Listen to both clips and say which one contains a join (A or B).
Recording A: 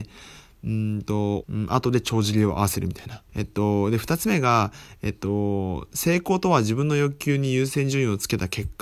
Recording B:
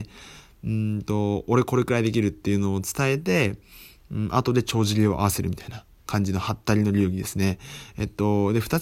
A